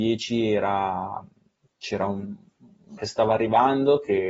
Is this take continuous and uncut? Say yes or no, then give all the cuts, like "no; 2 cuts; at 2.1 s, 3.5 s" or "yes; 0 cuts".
no; 1 cut; at 3.0 s